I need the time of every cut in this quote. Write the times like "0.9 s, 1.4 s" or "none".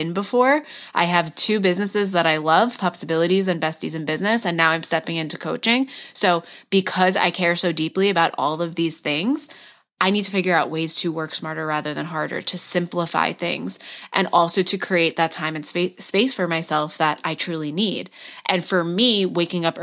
none

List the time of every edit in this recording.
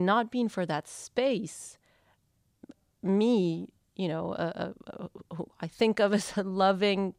none

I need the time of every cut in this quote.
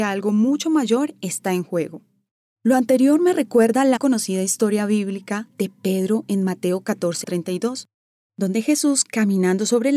4.0 s, 7.2 s

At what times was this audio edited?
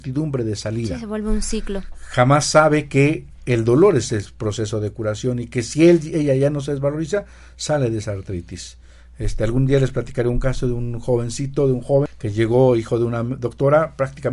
none

